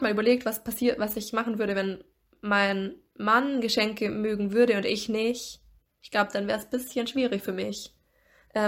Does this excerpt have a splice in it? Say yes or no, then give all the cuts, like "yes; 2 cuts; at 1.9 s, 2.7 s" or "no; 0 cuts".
no; 0 cuts